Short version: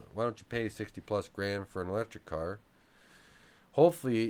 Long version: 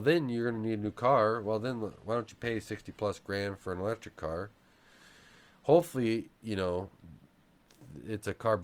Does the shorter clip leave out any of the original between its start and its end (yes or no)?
no